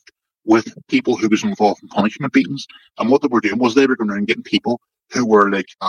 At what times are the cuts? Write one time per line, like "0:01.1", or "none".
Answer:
0:02.9